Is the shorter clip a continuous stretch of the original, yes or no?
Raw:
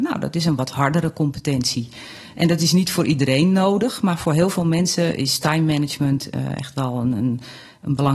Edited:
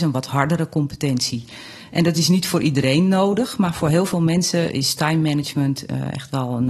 yes